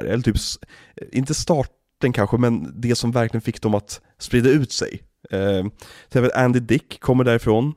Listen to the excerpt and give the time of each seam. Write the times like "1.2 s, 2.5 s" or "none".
none